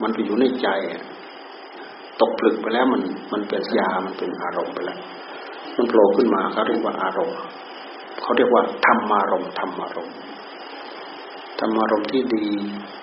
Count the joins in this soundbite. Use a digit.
1